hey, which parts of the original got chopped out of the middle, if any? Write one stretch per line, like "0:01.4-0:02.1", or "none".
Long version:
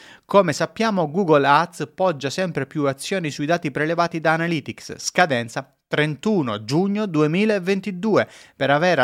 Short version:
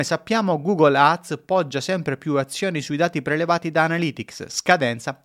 none